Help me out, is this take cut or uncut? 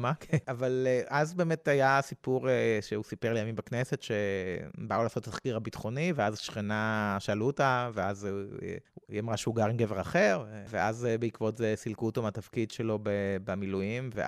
uncut